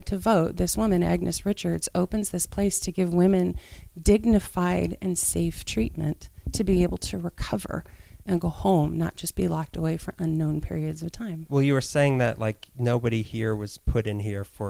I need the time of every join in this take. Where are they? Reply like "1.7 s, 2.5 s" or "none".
none